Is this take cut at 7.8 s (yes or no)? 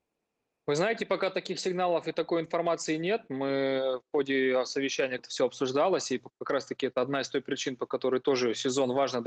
no